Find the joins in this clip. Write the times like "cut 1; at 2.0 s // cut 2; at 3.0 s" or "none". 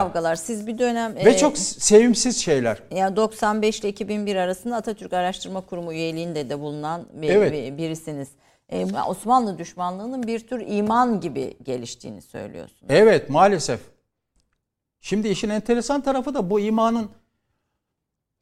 cut 1; at 8.9 s